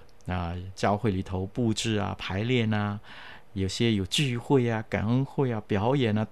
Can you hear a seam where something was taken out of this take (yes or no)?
no